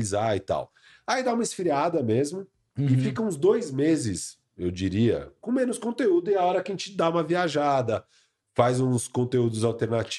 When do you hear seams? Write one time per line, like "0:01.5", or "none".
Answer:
0:05.4

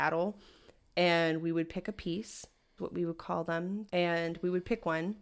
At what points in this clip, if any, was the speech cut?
0:02.8
0:03.9

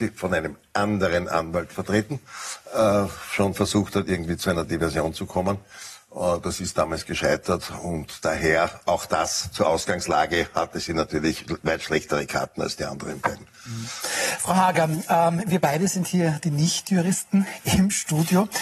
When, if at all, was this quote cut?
none

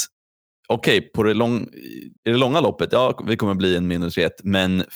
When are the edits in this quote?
0:02.2

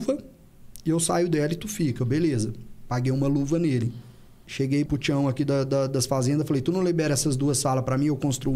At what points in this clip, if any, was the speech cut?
0:04.9

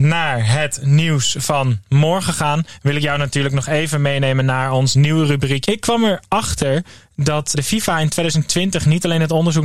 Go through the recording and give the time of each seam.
0:05.6
0:07.5

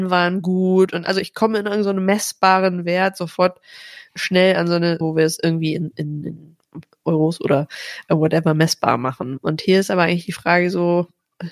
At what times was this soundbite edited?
0:05.0

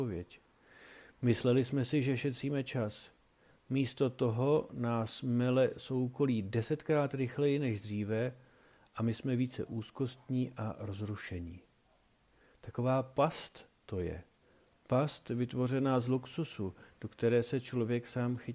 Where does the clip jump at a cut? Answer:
none

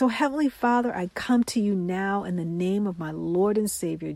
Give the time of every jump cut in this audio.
none

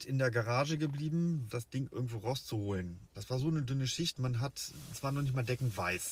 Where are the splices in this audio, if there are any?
0:01.5
0:03.1

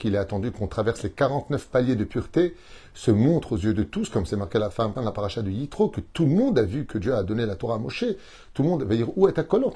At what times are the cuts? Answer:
0:04.9

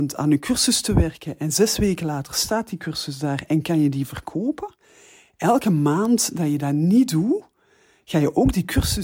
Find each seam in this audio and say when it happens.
none

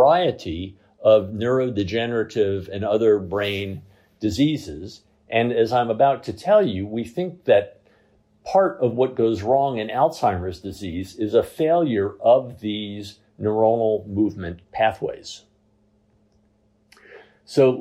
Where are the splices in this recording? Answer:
none

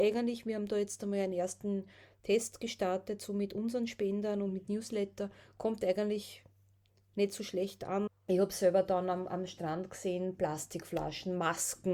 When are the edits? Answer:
0:08.1

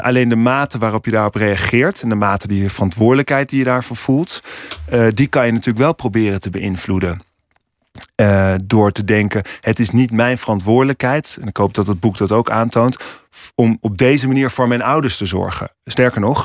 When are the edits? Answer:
none

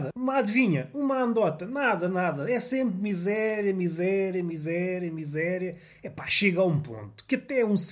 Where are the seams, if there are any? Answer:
none

